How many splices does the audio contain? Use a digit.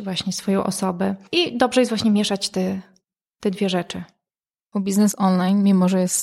1